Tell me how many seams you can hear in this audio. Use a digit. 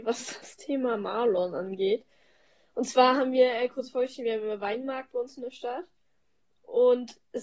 0